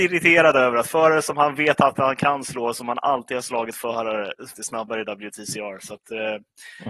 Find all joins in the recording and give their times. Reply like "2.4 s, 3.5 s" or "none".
4.5 s

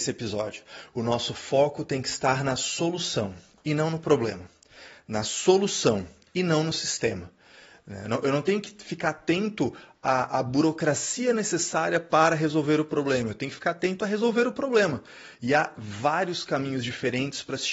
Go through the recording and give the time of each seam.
none

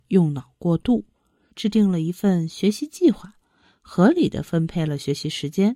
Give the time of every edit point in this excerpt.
1.5 s

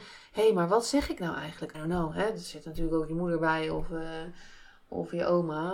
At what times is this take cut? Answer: 1.7 s

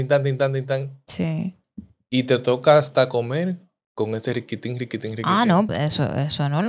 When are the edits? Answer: 5.7 s

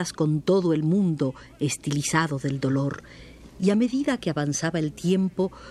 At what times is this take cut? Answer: none

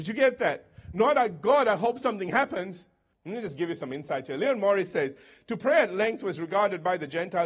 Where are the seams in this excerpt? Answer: 3.1 s

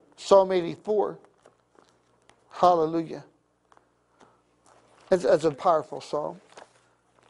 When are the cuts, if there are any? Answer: 2.4 s, 5.5 s

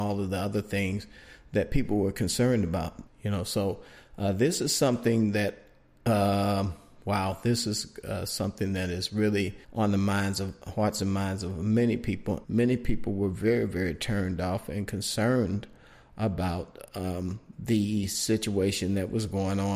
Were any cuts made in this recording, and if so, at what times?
3.1 s, 9.6 s, 12.4 s

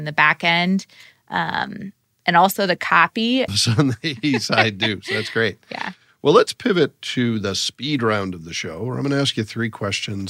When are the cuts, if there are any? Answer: 3.5 s

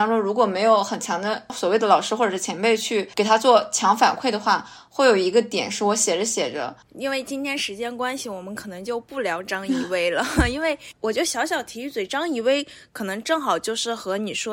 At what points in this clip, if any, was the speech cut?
6.8 s

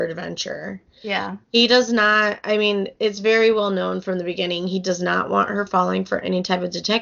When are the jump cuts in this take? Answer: none

